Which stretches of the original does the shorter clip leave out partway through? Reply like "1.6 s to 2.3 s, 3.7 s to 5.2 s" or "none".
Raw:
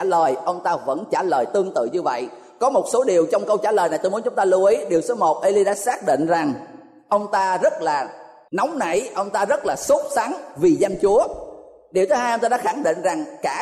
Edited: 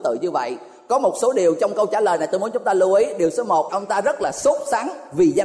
5.4 s to 9.1 s